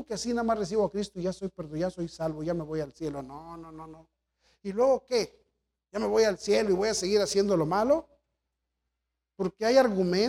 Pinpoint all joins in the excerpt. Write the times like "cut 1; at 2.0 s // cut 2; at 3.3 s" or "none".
none